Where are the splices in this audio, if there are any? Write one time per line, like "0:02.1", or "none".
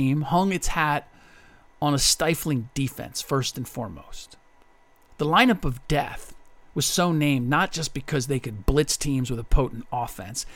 none